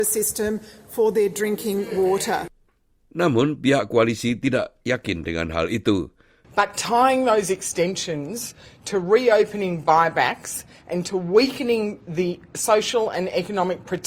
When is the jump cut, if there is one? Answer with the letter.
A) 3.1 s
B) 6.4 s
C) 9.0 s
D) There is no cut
B